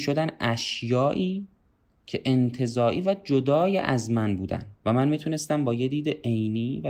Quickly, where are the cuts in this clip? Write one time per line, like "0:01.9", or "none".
0:04.8